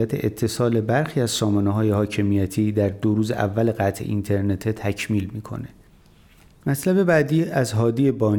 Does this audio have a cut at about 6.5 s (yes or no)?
no